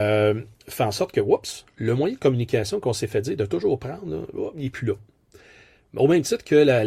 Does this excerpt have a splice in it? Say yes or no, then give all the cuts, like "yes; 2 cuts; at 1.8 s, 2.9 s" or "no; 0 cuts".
no; 0 cuts